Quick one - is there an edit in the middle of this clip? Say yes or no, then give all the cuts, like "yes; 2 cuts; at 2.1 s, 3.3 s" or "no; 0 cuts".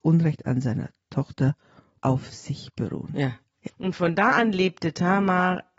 yes; 1 cut; at 3.7 s